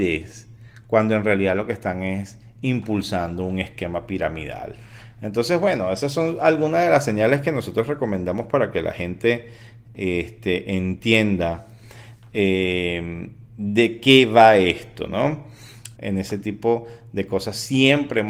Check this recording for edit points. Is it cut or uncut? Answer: cut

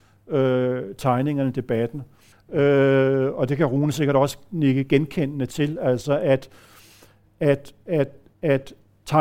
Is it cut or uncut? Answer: cut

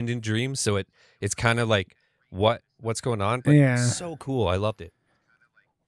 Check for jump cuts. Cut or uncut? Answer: uncut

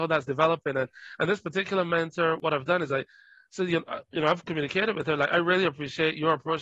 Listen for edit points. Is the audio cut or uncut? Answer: uncut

